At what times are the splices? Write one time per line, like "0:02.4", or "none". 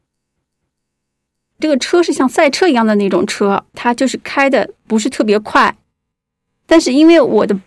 0:01.5
0:03.7
0:06.6